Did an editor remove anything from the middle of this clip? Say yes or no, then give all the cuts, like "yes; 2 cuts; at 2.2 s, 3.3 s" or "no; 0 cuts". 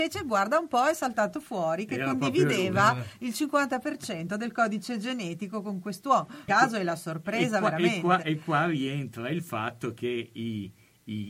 yes; 1 cut; at 6.5 s